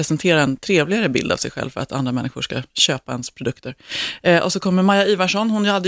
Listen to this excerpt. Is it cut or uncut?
uncut